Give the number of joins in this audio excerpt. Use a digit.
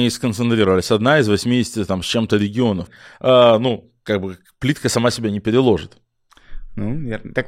1